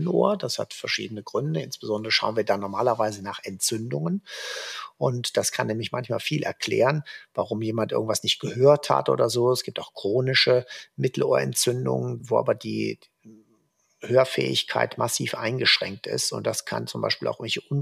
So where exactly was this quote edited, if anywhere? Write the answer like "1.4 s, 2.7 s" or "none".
12.2 s